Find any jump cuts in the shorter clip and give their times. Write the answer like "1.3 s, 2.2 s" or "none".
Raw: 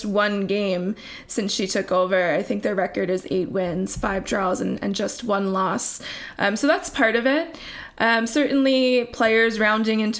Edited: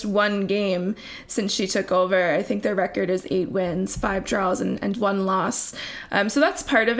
4.9 s